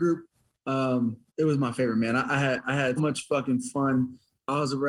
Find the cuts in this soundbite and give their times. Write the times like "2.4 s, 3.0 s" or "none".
1.3 s, 3.0 s